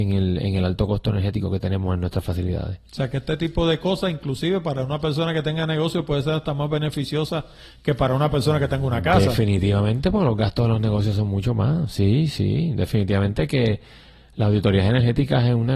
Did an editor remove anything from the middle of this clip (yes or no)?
no